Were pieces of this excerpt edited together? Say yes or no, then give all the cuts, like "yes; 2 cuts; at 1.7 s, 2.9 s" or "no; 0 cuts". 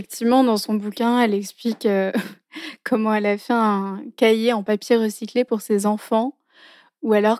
no; 0 cuts